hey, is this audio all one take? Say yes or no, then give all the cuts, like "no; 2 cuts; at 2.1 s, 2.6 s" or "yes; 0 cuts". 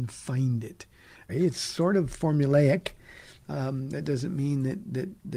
no; 1 cut; at 1.3 s